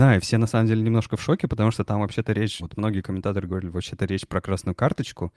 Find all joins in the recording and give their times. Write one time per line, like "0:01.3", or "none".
0:02.6